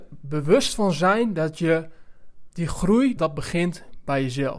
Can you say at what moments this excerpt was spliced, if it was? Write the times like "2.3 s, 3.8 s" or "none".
3.2 s